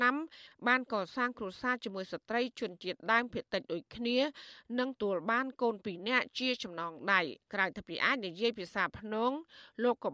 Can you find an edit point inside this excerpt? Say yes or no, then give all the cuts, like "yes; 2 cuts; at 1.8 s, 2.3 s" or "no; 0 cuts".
yes; 2 cuts; at 5.0 s, 7.4 s